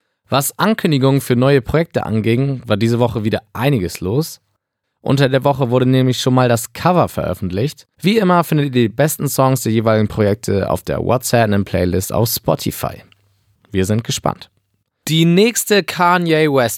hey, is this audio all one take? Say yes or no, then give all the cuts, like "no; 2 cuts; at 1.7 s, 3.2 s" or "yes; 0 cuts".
no; 3 cuts; at 4.8 s, 7.9 s, 13.5 s